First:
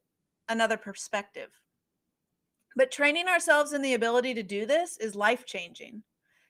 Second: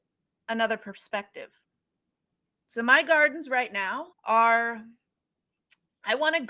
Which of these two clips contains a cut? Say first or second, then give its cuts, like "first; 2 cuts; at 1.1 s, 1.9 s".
second; 2 cuts; at 2.5 s, 4.1 s